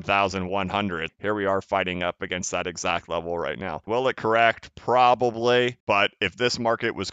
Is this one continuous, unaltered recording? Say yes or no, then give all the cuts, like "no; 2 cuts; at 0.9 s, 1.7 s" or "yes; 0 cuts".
no; 2 cuts; at 1.1 s, 3.9 s